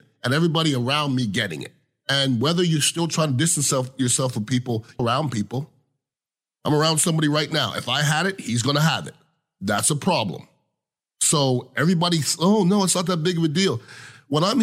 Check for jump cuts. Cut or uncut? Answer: cut